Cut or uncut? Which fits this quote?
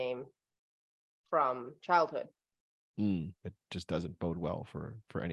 cut